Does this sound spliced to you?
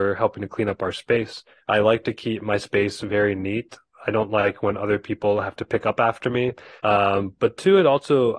yes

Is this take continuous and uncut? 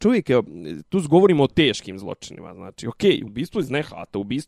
no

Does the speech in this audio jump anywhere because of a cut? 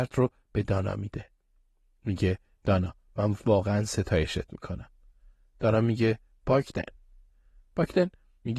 no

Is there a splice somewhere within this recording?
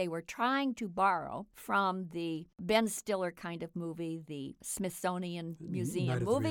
no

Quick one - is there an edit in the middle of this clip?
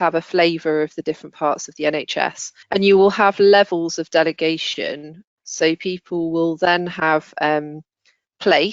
yes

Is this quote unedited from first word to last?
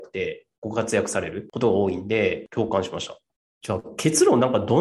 yes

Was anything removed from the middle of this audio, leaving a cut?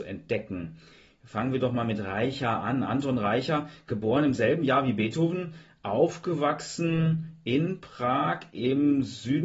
no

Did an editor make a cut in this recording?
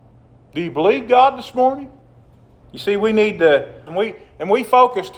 yes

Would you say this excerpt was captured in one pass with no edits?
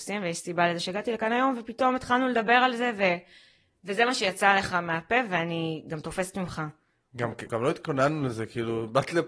no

